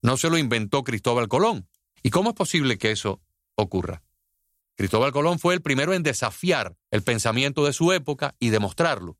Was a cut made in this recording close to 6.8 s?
yes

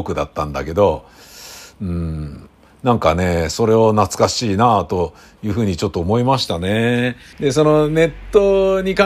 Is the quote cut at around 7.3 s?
yes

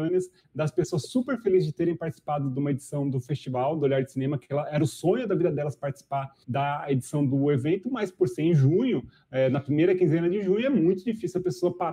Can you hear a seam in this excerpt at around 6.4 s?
yes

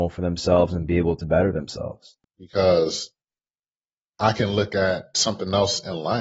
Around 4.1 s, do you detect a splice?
no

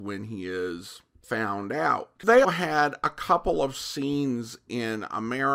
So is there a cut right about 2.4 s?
yes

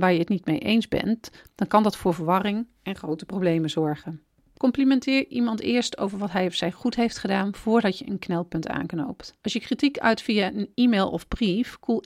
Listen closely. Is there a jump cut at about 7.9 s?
no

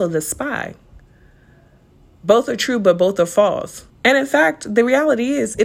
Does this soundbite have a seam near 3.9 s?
yes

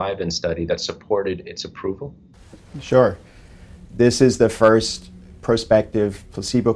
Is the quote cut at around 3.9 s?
no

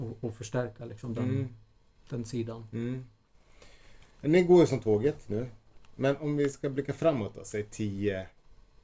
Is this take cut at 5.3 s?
yes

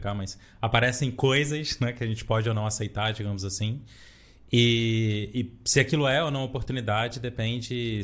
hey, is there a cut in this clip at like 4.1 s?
no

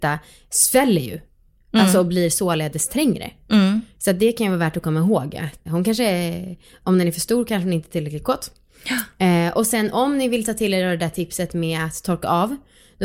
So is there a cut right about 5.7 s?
yes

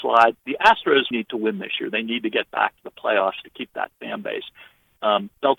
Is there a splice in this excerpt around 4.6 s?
no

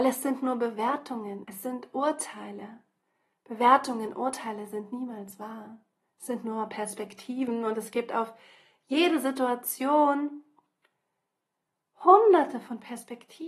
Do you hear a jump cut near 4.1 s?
no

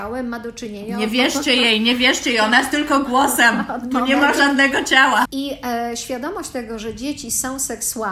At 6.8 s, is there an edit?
no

